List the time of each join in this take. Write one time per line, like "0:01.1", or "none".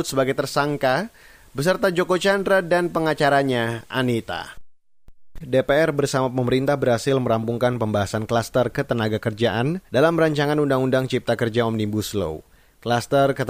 0:05.4
0:09.9